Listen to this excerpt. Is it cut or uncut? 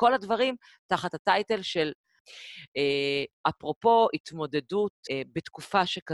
cut